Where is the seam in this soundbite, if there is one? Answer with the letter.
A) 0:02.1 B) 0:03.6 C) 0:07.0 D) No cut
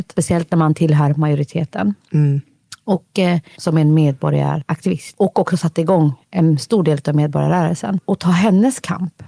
B